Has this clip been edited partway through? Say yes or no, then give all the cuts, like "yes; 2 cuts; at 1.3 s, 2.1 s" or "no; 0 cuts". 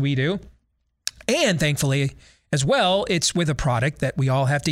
no; 0 cuts